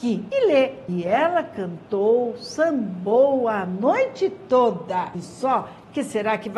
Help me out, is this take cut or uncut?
uncut